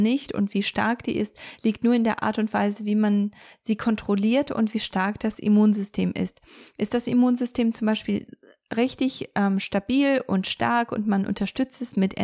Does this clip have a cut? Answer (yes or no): no